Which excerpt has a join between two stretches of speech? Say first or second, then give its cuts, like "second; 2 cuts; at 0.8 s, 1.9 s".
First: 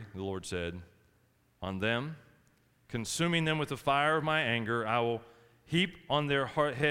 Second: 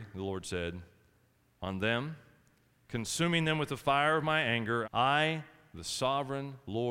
second; 1 cut; at 4.8 s